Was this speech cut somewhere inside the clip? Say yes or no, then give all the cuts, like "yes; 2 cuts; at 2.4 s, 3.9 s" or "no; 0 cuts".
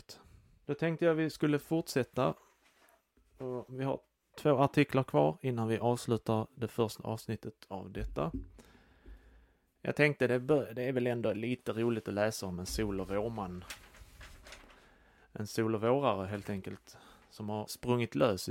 no; 0 cuts